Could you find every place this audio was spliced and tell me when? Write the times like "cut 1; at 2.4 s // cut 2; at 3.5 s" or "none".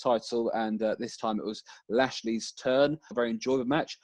cut 1; at 3.1 s